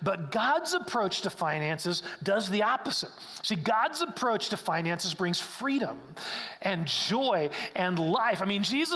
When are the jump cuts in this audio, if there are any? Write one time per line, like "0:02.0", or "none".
none